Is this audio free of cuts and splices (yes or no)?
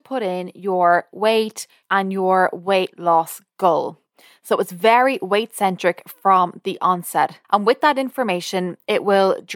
no